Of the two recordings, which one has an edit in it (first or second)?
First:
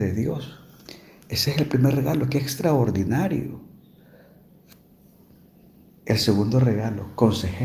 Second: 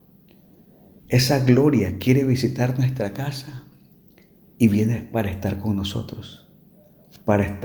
second